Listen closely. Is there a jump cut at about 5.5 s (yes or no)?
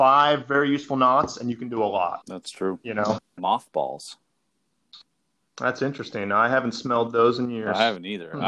no